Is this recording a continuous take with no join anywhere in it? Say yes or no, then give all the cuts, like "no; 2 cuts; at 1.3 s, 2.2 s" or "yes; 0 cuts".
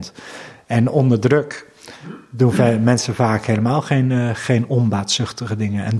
yes; 0 cuts